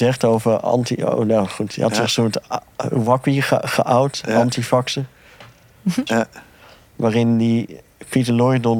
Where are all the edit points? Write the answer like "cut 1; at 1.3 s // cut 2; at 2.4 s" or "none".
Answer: cut 1; at 6.1 s